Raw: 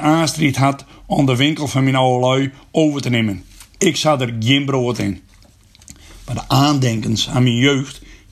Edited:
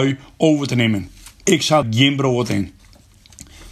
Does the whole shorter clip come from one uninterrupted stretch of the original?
no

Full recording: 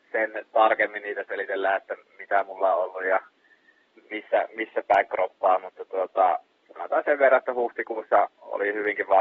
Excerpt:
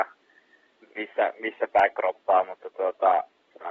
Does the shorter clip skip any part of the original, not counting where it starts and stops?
no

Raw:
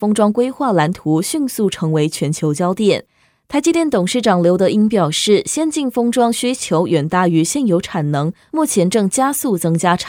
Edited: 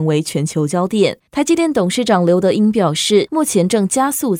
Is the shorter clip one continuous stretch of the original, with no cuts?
no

